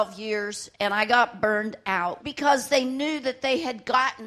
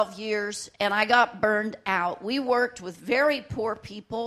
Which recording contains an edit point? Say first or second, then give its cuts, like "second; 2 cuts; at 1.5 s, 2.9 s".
first; 1 cut; at 2.2 s